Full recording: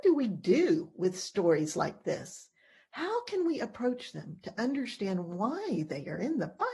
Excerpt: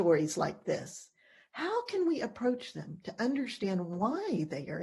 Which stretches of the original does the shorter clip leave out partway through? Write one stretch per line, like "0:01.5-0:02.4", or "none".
none